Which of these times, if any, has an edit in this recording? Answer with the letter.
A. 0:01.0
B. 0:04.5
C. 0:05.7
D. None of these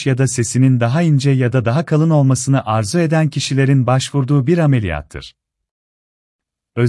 D